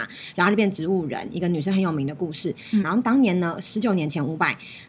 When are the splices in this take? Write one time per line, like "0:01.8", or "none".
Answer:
0:02.8